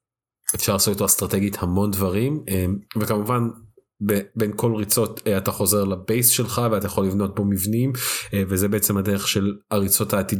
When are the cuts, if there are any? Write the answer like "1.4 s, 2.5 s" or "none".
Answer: none